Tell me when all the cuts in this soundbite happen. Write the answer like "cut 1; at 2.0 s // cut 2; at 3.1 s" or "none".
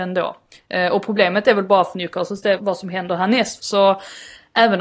cut 1; at 2.6 s // cut 2; at 3.6 s

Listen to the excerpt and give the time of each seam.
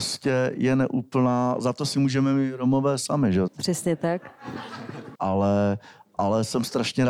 cut 1; at 3.5 s // cut 2; at 5.2 s

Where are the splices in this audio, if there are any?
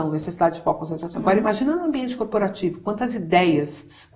cut 1; at 1.1 s

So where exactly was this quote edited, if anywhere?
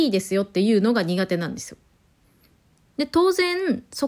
cut 1; at 2.9 s

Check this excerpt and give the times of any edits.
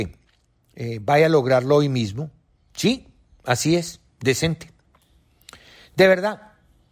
cut 1; at 2.7 s

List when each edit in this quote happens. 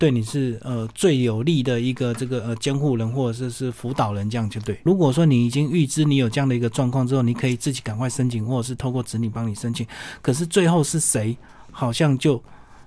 cut 1; at 4.9 s

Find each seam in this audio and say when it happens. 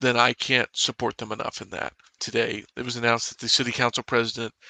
cut 1; at 2.2 s

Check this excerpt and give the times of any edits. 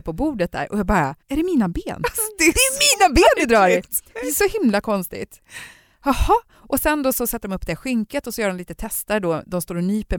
cut 1; at 1.2 s

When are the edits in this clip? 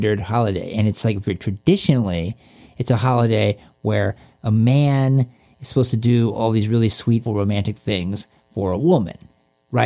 cut 1; at 7.3 s

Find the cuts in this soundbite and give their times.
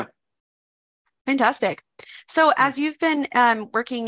none

